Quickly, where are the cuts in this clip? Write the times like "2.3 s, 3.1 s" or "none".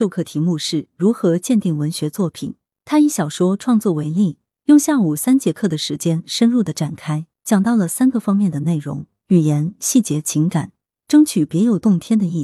7.3 s